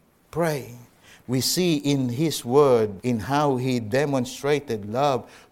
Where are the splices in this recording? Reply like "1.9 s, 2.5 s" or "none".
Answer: 1.2 s, 3.0 s